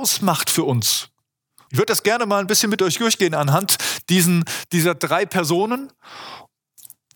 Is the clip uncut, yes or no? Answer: no